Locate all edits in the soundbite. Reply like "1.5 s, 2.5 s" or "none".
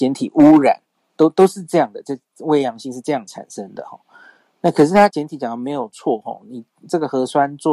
5.1 s